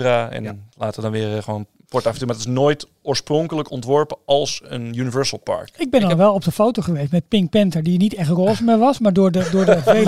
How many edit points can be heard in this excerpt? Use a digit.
0